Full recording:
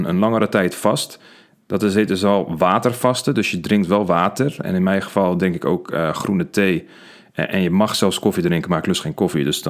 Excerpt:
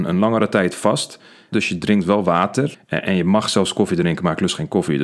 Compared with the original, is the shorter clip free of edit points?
no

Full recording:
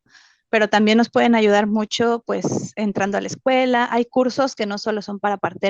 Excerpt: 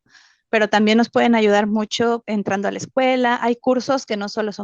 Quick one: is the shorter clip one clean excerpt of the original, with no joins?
no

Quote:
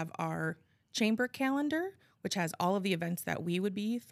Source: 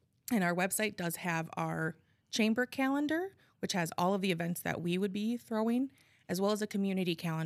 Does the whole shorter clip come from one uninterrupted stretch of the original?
yes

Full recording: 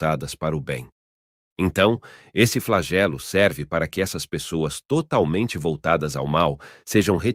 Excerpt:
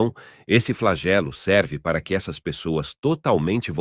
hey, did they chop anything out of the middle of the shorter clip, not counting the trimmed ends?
no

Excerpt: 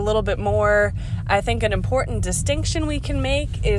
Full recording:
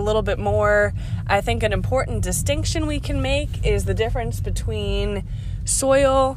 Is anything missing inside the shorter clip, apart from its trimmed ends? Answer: no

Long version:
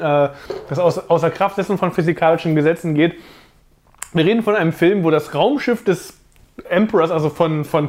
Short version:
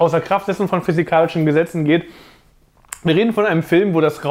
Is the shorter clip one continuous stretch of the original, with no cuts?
yes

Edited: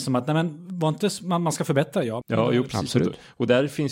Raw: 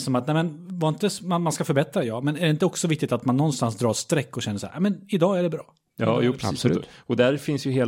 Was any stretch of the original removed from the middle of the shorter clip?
yes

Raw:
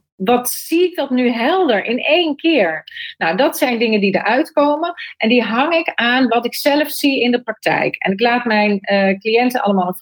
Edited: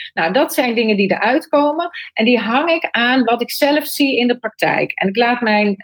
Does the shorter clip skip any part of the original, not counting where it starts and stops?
no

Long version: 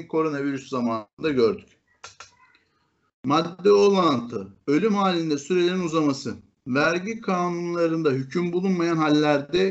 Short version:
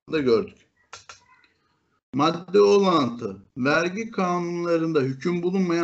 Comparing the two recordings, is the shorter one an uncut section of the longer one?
no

